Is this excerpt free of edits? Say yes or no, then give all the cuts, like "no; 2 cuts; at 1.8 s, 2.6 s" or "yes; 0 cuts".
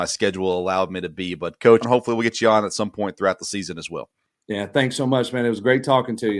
no; 1 cut; at 1.8 s